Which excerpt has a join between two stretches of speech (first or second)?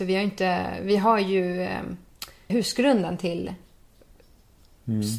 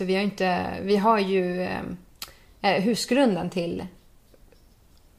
first